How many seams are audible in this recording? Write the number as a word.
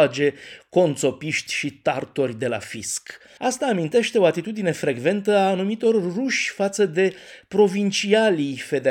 one